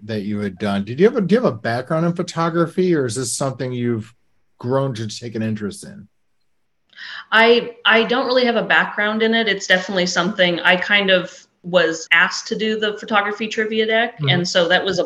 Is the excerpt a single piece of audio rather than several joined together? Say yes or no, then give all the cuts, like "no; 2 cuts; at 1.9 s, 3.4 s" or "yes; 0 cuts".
yes; 0 cuts